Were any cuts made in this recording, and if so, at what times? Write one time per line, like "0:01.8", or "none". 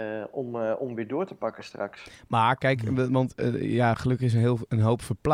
none

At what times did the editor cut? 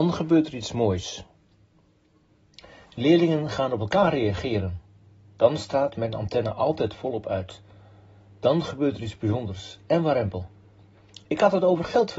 none

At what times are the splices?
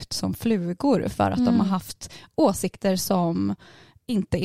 none

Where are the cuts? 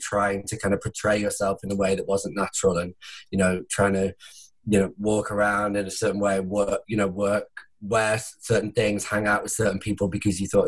none

